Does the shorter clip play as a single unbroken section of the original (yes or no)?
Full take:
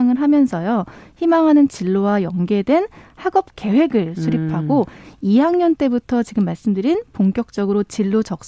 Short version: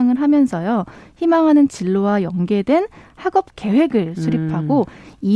yes